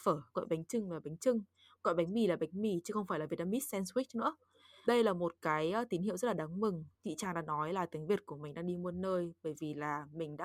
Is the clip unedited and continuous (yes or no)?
no